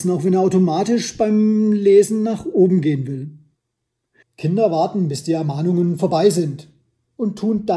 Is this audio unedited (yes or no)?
no